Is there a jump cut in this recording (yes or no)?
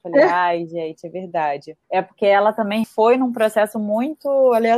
yes